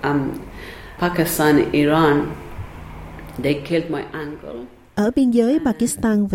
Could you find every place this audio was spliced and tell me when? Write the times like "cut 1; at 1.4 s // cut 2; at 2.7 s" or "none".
cut 1; at 1.0 s